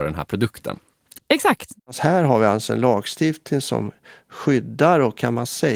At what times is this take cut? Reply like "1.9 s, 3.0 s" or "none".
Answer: 1.2 s